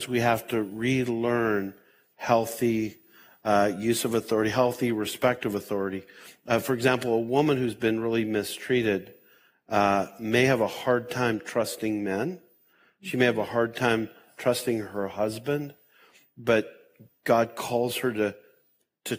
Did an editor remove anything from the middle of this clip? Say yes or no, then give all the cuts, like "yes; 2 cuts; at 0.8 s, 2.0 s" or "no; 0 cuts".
no; 0 cuts